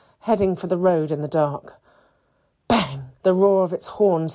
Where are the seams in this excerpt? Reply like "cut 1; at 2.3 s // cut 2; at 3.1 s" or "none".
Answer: cut 1; at 3.2 s